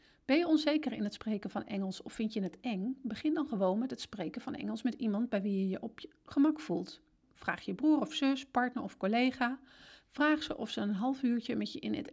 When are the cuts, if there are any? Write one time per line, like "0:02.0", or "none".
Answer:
0:07.2